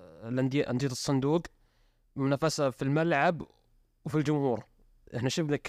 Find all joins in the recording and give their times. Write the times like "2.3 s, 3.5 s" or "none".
none